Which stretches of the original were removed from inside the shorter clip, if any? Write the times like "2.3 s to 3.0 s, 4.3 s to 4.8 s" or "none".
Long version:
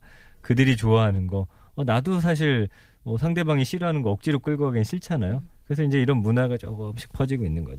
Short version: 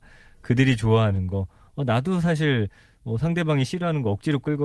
none

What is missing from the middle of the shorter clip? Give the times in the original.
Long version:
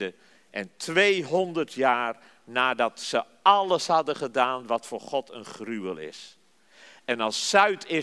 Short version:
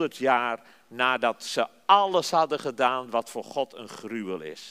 none

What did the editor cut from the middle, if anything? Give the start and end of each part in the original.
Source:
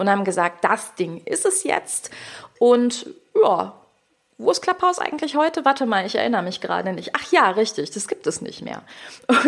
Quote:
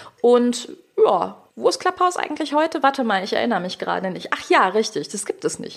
3.9 s to 4.3 s

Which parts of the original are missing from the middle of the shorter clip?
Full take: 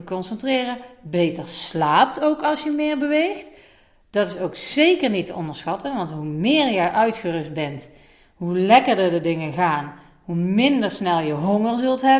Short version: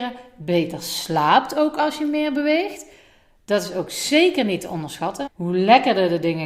5.9 s to 8.3 s

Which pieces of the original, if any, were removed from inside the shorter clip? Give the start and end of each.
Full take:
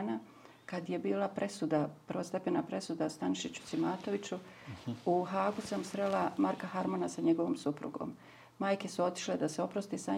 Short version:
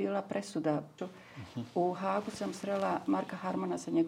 2.0 s to 4.3 s

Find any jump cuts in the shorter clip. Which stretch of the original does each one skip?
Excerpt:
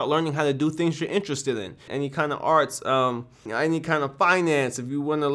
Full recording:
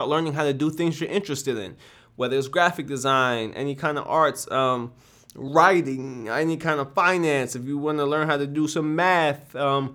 1.9 s to 3.5 s, 5.1 s to 6.2 s

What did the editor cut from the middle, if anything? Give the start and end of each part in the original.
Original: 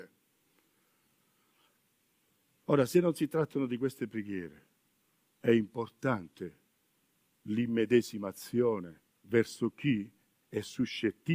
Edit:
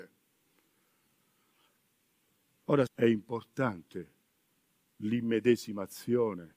2.9 s to 5.3 s

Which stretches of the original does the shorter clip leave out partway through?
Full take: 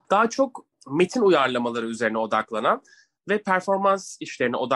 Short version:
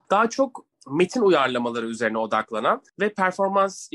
2.9 s to 3.2 s

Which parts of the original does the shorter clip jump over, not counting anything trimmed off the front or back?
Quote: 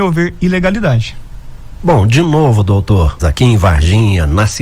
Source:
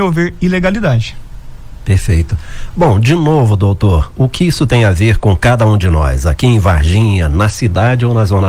1.8 s to 2.7 s, 4.1 s to 6.2 s

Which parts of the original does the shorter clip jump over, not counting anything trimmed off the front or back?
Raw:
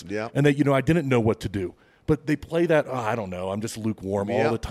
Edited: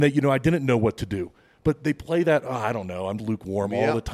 3.6 s to 3.8 s

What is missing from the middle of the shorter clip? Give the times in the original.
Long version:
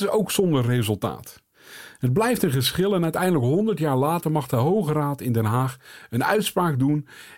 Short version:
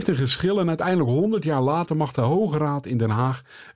none

